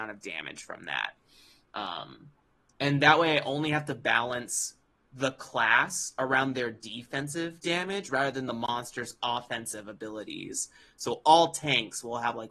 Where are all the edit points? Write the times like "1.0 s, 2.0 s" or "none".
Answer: none